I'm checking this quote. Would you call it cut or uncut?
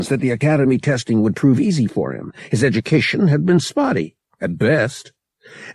uncut